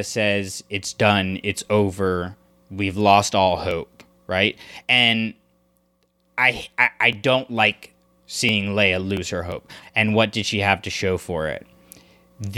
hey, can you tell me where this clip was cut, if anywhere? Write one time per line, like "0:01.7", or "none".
0:09.8